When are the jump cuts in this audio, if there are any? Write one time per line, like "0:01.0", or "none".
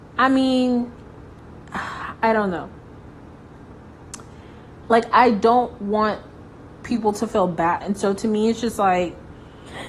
0:04.8
0:07.8